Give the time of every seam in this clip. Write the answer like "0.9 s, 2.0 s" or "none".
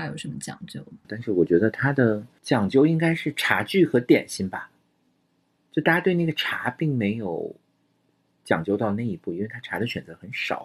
1.0 s